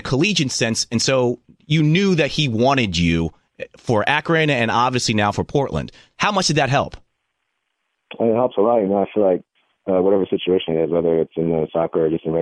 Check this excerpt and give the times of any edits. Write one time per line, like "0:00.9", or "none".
none